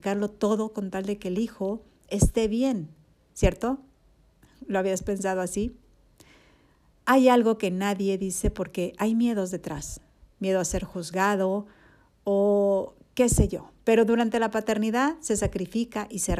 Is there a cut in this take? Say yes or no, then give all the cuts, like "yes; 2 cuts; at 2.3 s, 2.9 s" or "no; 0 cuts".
no; 0 cuts